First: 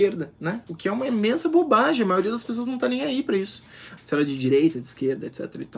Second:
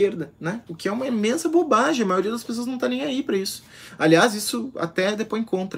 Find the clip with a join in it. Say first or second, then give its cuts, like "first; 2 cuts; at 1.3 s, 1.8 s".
first; 1 cut; at 4.0 s